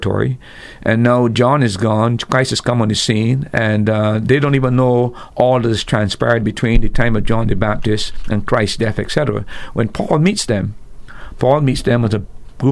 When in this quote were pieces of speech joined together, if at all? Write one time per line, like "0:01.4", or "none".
none